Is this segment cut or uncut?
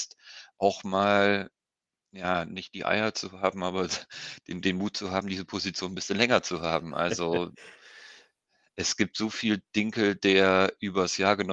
uncut